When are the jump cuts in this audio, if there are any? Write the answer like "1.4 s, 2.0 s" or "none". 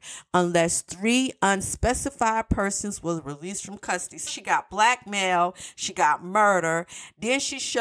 4.3 s